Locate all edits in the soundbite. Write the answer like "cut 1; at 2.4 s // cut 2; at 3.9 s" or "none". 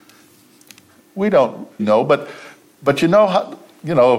cut 1; at 1.8 s